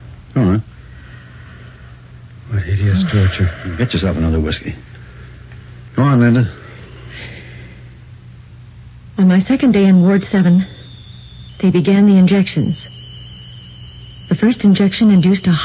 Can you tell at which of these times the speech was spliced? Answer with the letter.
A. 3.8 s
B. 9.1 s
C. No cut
C